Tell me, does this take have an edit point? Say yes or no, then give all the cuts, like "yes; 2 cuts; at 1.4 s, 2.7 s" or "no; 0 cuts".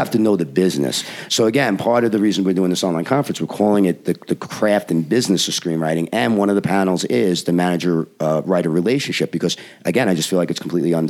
no; 0 cuts